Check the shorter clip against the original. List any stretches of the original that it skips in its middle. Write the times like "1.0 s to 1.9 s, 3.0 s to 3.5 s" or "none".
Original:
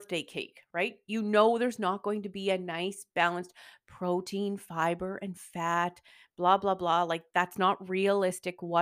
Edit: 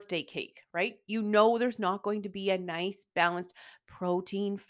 none